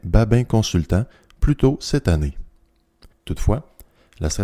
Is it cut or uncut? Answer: cut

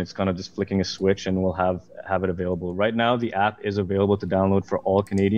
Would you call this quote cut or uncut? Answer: uncut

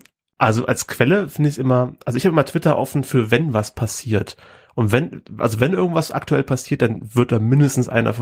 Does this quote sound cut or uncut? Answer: uncut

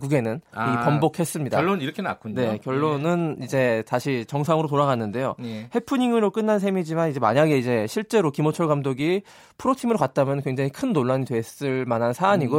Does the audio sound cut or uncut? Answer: uncut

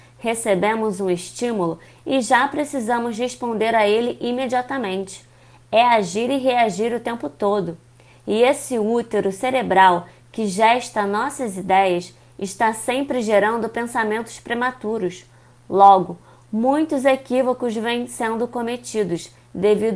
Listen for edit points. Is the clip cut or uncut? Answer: uncut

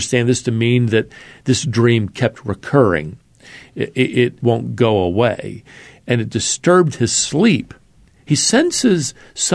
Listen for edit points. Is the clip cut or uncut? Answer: cut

